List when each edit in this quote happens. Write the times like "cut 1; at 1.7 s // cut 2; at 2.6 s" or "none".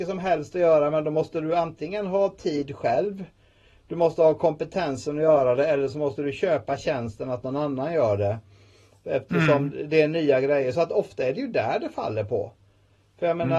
none